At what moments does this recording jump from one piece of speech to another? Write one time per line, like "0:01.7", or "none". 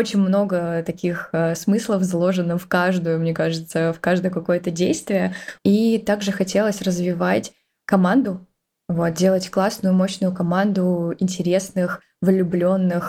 0:05.6

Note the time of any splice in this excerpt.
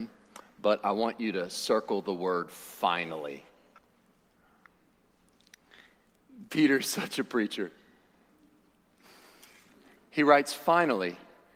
none

